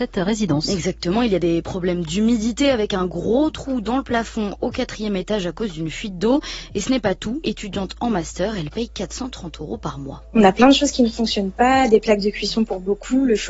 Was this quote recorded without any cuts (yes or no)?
no